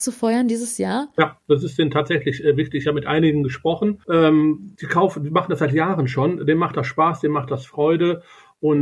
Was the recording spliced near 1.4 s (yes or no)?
no